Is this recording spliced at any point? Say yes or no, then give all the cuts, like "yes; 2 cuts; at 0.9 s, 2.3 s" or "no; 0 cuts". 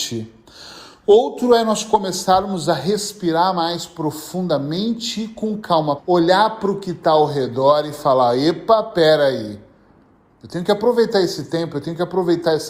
yes; 1 cut; at 6.0 s